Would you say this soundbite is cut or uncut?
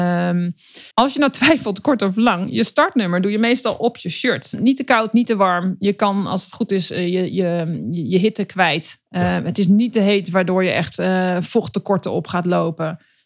cut